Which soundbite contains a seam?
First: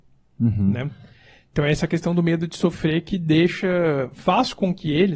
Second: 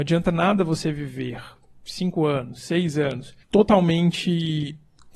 second; 1 cut; at 3.4 s

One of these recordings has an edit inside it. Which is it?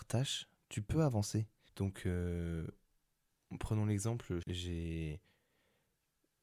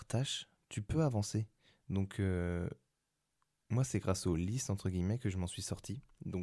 first; 2 cuts; at 1.7 s, 4.4 s

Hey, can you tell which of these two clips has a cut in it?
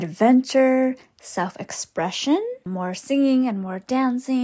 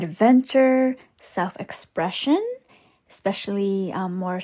first; 1 cut; at 2.7 s

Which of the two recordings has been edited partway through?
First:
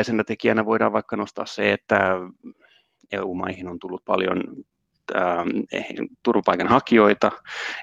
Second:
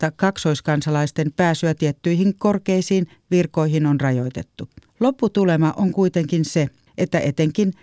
second; 2 cuts; at 4.9 s, 6.9 s

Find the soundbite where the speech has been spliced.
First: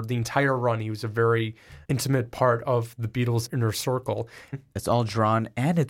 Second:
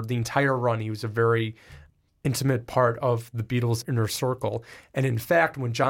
first; 2 cuts; at 1.8 s, 4.5 s

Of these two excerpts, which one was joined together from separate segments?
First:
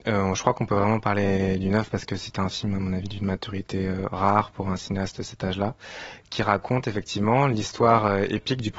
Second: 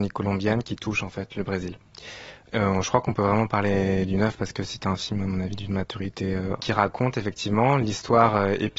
second; 2 cuts; at 2.5 s, 6.6 s

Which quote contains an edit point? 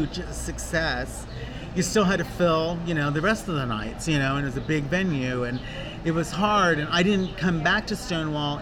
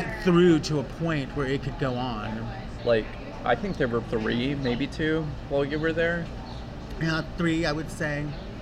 second; 2 cuts; at 2.8 s, 4.0 s

